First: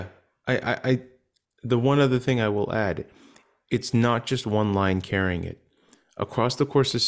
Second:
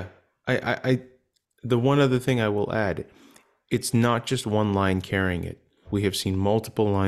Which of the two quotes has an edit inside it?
second; 1 cut; at 5.8 s

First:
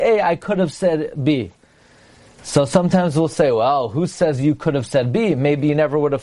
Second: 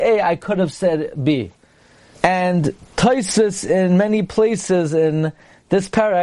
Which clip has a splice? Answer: second; 1 cut; at 2.2 s

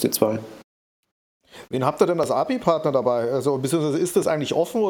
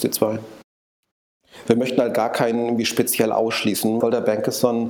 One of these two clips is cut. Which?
second; 2 cuts; at 1.7 s, 4.0 s

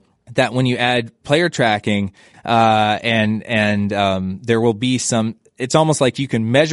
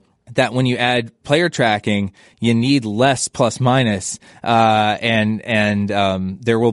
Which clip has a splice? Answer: first; 1 cut; at 2.3 s

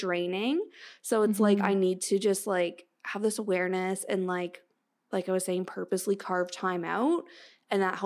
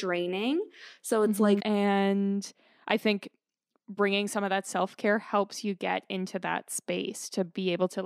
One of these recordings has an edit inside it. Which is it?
second; 1 cut; at 1.6 s

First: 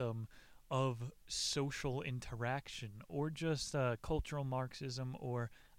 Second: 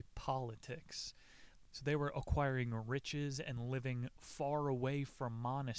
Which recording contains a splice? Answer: second; 1 cut; at 1.7 s

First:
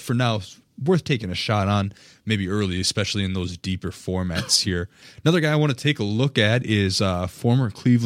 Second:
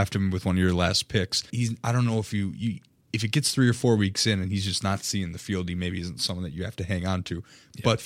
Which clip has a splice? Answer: second; 1 cut; at 1.5 s

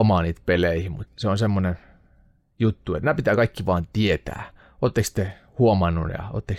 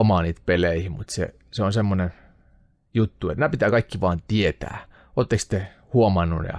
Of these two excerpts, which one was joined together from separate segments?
first; 1 cut; at 1.1 s

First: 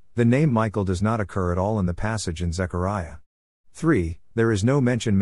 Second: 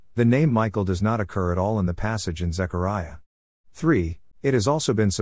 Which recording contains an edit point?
second; 1 cut; at 4.3 s

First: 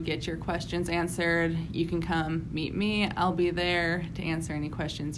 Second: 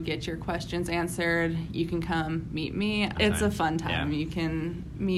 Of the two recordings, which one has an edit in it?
second; 1 cut; at 3.1 s

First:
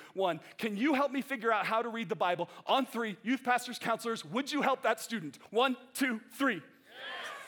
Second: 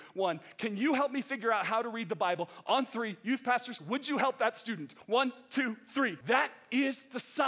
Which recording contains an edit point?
second; 2 cuts; at 3.8 s, 6.2 s

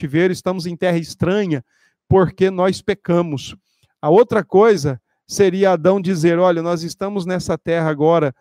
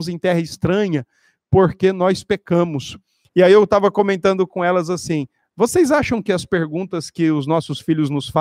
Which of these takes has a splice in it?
second; 1 cut; at 3.3 s

